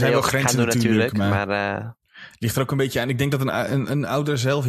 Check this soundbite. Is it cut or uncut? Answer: uncut